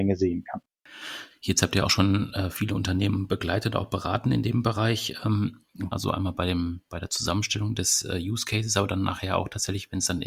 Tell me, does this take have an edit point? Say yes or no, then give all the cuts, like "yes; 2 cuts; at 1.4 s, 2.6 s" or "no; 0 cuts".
yes; 1 cut; at 5.9 s